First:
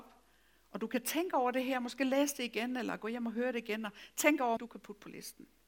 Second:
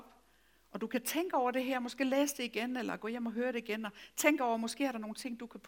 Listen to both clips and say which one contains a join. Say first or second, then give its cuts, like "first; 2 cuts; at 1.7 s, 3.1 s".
first; 1 cut; at 4.6 s